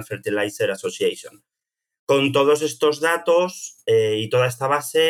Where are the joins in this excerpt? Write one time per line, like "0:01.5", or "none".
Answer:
none